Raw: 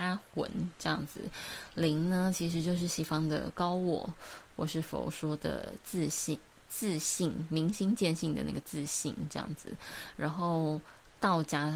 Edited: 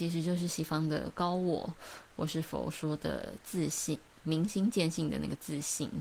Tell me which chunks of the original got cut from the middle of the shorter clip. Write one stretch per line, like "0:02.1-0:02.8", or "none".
0:06.6-0:07.5